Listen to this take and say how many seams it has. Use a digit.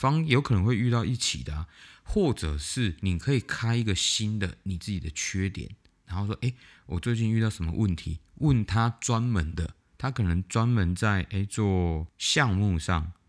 0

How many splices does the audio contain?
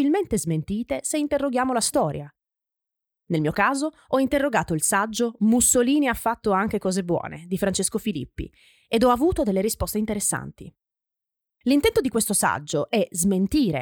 0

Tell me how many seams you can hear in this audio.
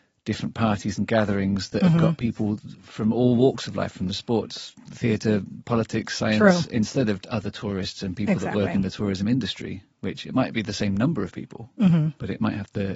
1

